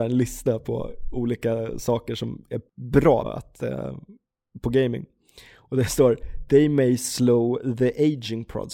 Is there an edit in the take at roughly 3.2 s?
yes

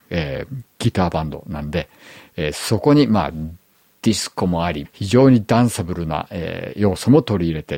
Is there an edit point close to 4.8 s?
yes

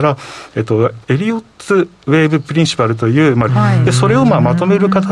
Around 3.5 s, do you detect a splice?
yes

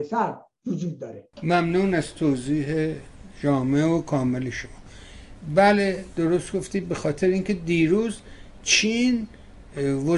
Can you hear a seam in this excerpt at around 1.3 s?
yes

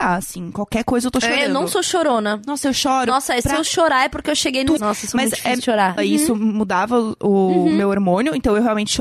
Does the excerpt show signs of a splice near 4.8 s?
yes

